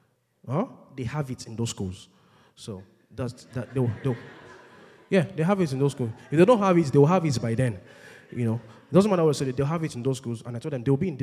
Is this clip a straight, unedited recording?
yes; 0 cuts

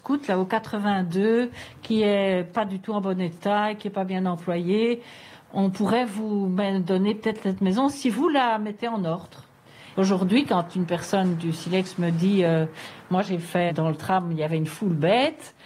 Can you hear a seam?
yes; 2 cuts; at 9.9 s, 13.7 s

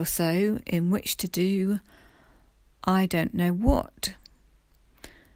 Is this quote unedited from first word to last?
yes; 0 cuts

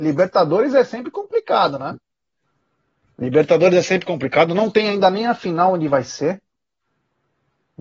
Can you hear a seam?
no; 0 cuts

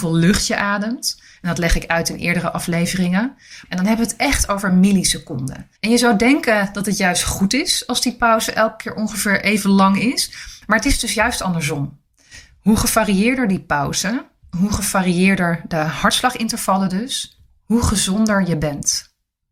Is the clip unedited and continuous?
no; 2 cuts; at 3.6 s, 5.7 s

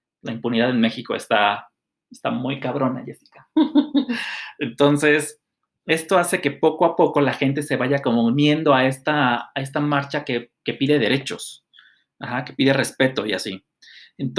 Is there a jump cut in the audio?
no; 0 cuts

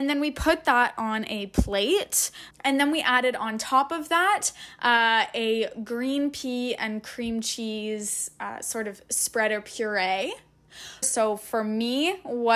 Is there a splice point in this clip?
yes; 2 cuts; at 2.5 s, 11.0 s

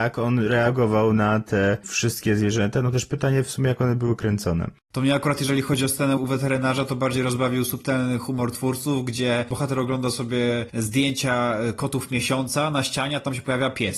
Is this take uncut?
no; 1 cut; at 6.2 s

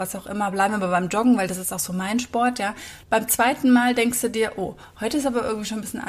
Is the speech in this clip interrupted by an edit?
yes; 1 cut; at 3.0 s

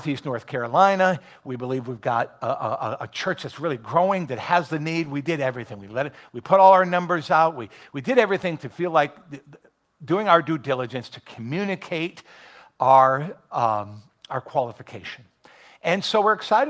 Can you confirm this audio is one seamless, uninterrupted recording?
yes; 0 cuts

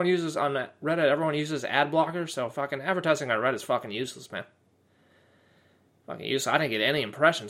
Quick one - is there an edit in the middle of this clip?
no; 0 cuts

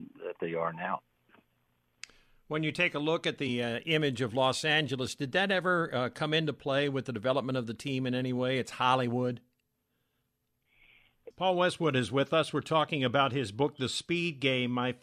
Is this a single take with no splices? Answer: no; 1 cut; at 11.3 s

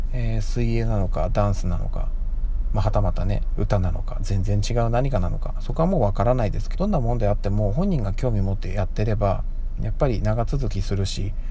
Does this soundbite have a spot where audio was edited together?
yes; 2 cuts; at 6.7 s, 9.8 s

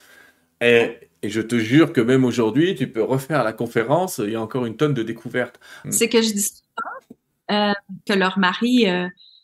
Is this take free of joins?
no; 2 cuts; at 5.8 s, 8.1 s

